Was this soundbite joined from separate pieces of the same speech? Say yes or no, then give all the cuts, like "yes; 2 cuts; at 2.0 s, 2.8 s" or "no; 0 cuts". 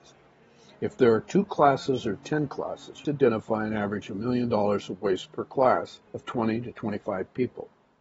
yes; 2 cuts; at 3.1 s, 6.1 s